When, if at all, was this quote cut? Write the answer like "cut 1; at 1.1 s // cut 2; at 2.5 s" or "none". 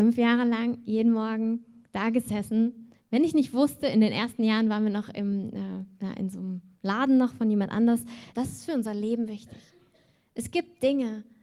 cut 1; at 8.3 s

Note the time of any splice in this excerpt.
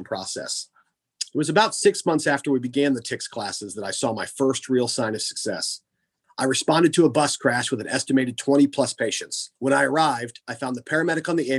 cut 1; at 6.2 s // cut 2; at 9.6 s

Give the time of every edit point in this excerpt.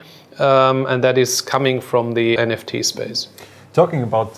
cut 1; at 2.4 s

